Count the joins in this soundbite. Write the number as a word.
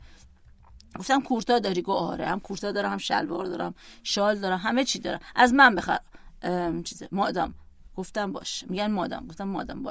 zero